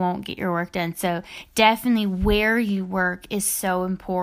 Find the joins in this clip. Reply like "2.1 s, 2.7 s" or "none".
none